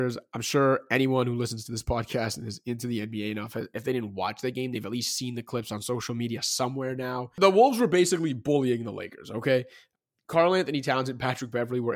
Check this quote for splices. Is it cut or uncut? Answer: uncut